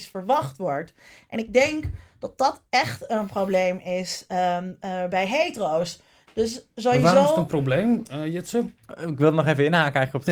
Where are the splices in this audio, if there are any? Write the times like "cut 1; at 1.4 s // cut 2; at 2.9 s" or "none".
none